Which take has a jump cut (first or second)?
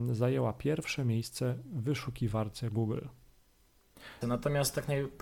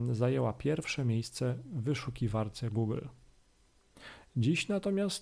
first